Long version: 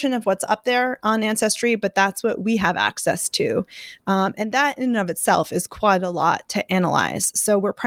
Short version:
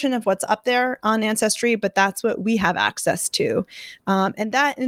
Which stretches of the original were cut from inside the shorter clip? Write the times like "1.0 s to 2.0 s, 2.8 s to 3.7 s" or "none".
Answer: none